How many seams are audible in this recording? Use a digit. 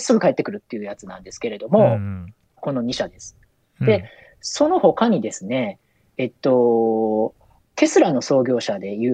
2